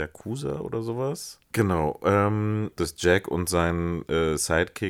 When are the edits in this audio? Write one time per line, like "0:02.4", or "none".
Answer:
0:01.5
0:02.8